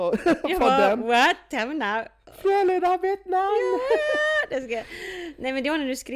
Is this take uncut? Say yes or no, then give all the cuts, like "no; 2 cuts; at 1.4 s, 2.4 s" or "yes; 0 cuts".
yes; 0 cuts